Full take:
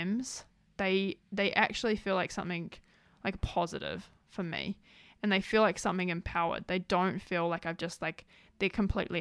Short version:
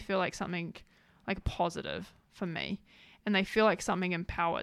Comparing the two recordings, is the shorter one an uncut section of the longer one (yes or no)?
yes